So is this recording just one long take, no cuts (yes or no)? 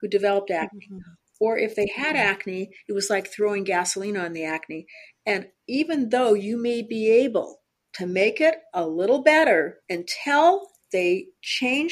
no